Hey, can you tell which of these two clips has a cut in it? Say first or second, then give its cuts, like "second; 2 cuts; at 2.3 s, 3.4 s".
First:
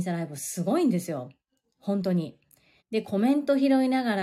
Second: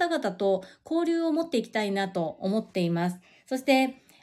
first; 1 cut; at 2.8 s